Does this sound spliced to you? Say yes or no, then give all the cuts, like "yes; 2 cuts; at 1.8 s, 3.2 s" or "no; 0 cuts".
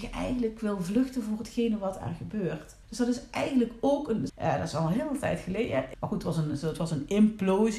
yes; 3 cuts; at 2.8 s, 4.3 s, 5.9 s